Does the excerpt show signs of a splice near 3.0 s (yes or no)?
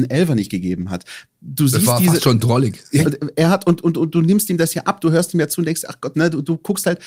yes